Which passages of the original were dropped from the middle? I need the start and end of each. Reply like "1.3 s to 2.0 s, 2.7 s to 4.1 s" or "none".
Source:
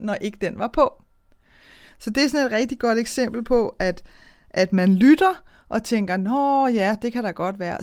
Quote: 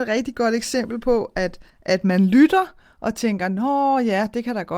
4.1 s to 4.4 s